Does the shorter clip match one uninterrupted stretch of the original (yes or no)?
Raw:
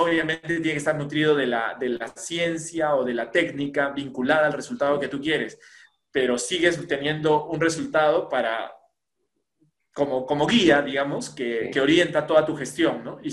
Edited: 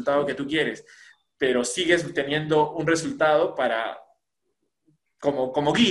yes